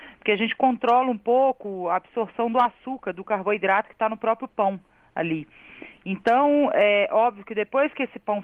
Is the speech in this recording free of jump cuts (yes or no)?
yes